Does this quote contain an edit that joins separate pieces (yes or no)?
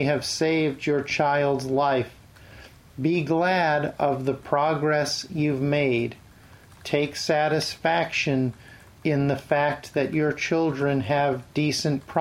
yes